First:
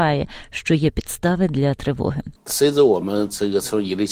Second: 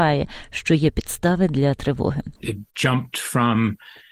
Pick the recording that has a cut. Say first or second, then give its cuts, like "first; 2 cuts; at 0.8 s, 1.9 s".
second; 1 cut; at 2.4 s